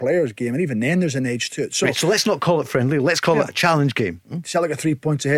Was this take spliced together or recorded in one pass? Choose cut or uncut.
cut